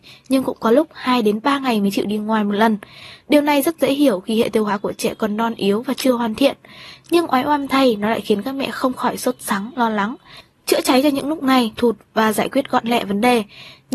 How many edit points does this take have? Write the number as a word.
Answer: one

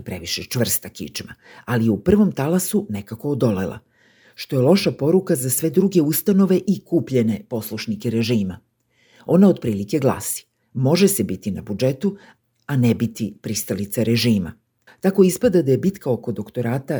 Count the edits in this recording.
one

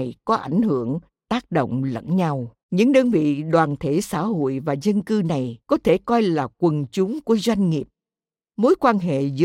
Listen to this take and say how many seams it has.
two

